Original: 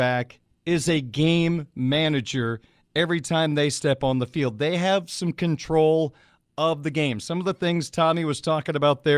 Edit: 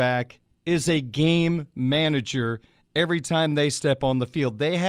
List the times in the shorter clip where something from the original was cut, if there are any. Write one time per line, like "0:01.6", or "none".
none